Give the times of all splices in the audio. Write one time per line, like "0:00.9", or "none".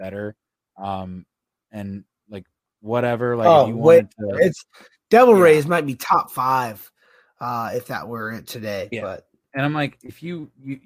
none